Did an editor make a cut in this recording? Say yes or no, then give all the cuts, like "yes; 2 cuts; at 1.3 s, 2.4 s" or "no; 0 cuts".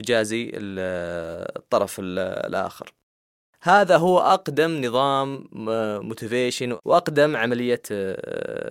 no; 0 cuts